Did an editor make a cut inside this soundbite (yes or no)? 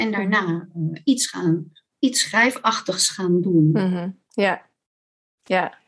no